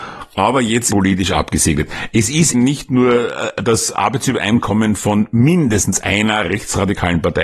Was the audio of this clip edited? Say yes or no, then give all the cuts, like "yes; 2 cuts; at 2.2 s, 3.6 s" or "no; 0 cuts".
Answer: yes; 2 cuts; at 0.9 s, 2.5 s